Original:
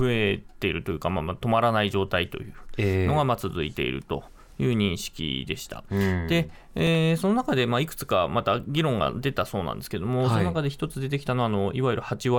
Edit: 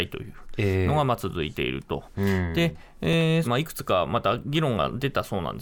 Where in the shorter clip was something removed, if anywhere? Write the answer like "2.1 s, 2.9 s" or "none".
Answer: 2.1 s, 3.4 s